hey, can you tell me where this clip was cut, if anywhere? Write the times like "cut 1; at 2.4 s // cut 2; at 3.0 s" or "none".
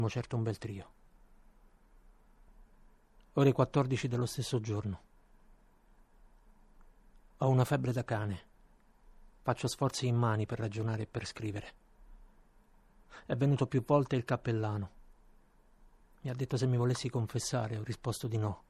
none